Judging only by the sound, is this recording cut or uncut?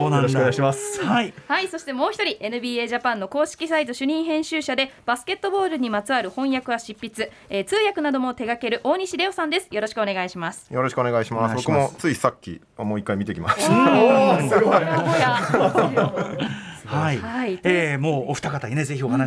cut